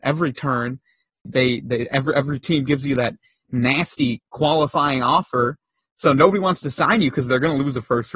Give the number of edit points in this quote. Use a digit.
1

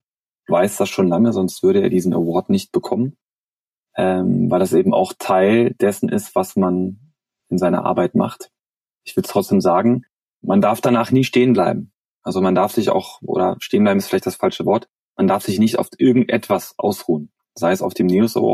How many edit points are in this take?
0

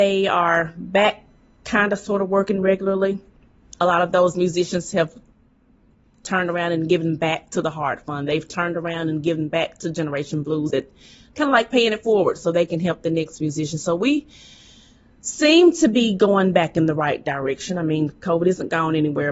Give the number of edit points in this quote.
1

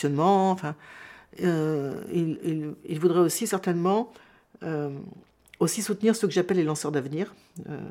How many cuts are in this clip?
0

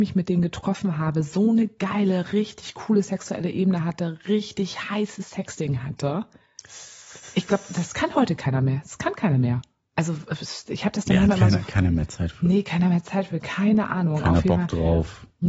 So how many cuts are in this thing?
0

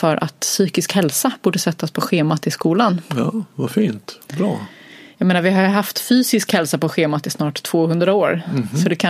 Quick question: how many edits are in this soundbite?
0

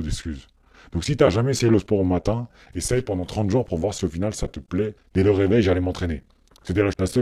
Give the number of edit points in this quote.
1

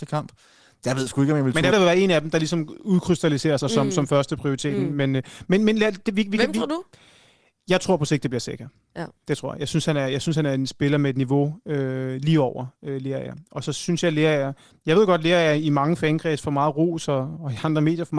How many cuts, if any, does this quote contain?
1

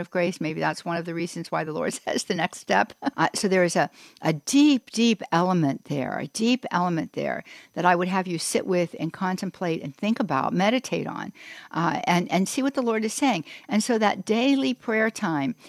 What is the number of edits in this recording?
2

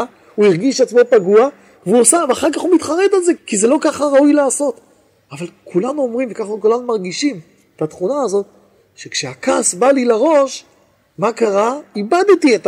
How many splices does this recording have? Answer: 1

